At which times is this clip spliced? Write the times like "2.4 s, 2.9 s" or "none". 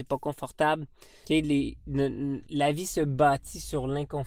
1.2 s, 2.5 s